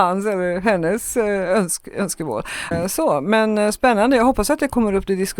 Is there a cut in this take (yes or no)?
yes